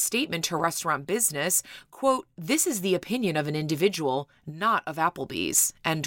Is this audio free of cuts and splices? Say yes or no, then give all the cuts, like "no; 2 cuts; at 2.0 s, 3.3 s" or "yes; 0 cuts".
yes; 0 cuts